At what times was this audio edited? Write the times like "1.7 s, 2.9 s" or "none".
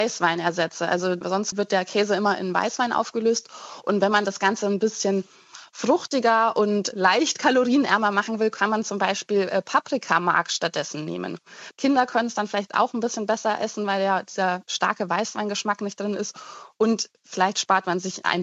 11.7 s